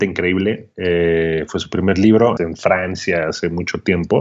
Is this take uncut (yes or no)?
no